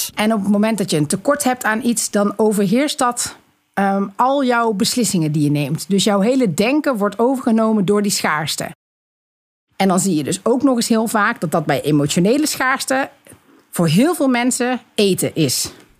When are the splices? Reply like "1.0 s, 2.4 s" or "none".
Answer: none